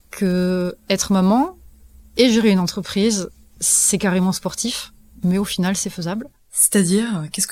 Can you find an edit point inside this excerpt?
no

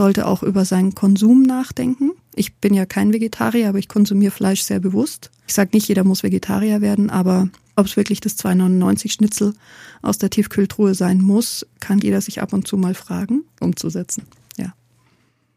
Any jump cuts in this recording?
yes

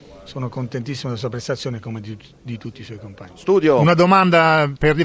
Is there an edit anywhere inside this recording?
no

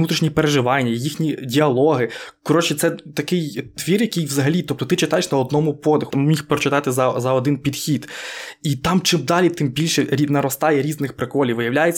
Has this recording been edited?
yes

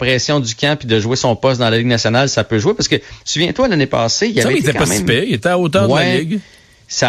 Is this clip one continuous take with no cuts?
yes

